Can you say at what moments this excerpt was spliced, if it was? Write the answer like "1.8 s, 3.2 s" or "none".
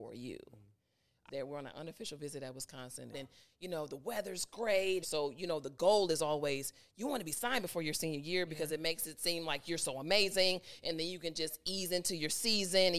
1.3 s, 3.1 s, 5.0 s